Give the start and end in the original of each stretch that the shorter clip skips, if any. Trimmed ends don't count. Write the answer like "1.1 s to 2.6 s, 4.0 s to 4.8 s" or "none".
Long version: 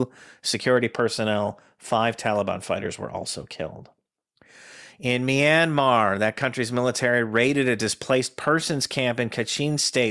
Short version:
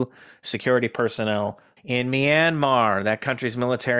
1.8 s to 4.9 s